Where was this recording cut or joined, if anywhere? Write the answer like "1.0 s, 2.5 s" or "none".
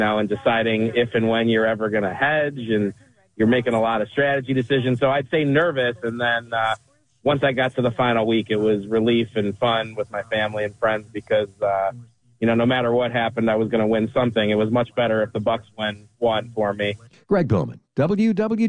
17.1 s